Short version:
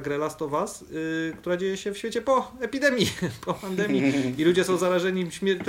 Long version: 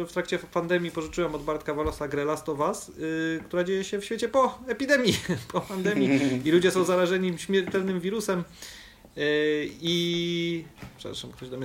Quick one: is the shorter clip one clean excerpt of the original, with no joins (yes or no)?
yes